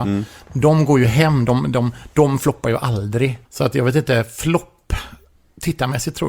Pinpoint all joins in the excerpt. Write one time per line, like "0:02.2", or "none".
0:03.4